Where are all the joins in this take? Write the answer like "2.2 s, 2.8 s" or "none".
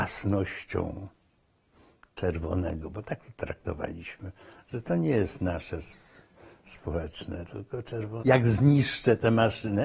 8.2 s